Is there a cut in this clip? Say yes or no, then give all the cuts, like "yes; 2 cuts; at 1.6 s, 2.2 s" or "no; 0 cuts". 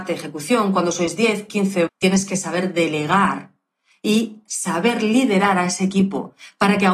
yes; 1 cut; at 1.9 s